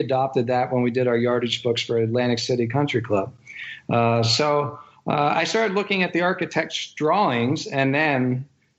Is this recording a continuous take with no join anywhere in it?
yes; 0 cuts

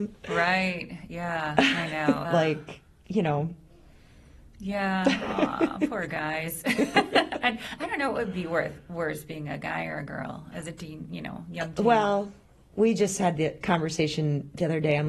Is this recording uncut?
no; 2 cuts; at 2.2 s, 10.5 s

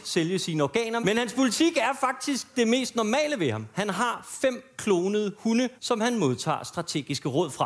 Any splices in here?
yes; 1 cut; at 5.8 s

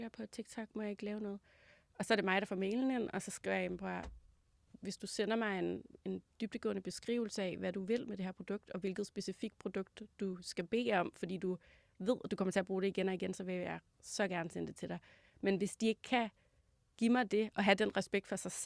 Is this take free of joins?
yes; 0 cuts

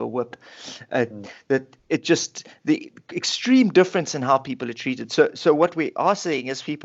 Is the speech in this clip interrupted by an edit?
no; 0 cuts

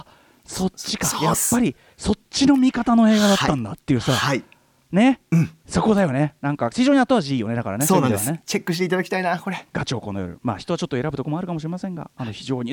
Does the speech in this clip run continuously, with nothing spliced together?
no; 1 cut; at 9.7 s

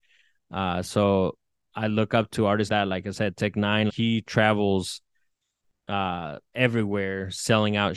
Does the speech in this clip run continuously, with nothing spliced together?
no; 2 cuts; at 2.7 s, 3.9 s

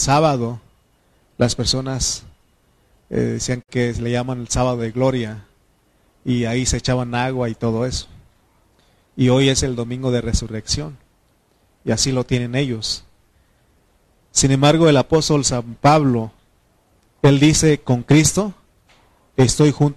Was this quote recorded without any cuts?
yes; 0 cuts

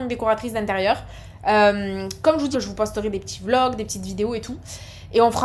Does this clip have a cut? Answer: yes; 1 cut; at 2.5 s

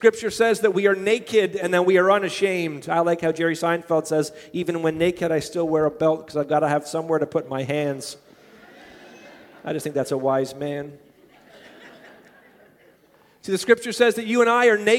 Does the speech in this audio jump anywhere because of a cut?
no; 0 cuts

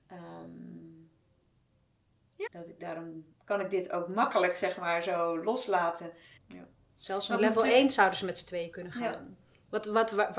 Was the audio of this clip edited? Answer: yes; 2 cuts; at 2.5 s, 6.4 s

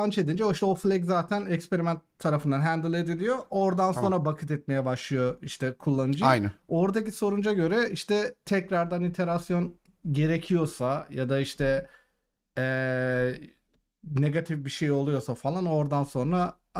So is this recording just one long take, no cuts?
yes; 0 cuts

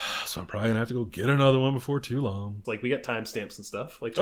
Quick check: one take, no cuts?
no; 1 cut; at 2.6 s

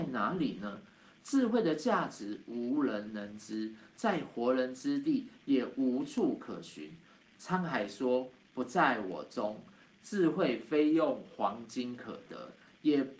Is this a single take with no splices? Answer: no; 1 cut; at 7.3 s

